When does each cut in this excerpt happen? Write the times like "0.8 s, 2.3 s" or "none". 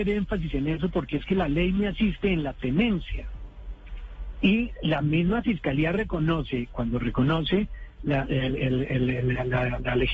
none